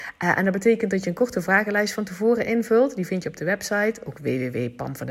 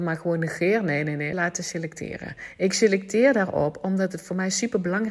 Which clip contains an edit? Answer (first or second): second